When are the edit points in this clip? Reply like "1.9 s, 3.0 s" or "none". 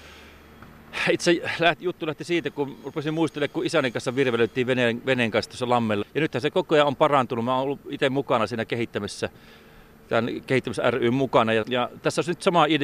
6.0 s, 11.6 s